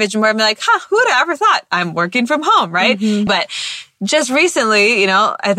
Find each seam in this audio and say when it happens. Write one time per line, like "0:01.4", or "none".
0:03.3